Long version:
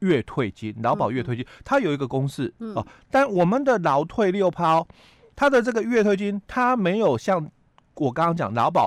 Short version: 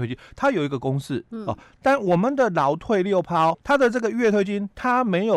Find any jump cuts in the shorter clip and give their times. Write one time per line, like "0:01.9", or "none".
0:03.5